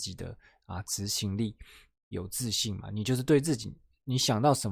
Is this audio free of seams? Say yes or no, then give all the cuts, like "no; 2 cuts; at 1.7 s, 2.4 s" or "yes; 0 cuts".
yes; 0 cuts